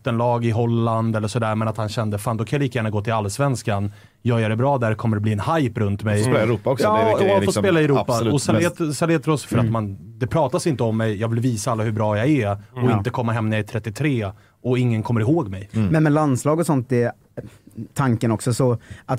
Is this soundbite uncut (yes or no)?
no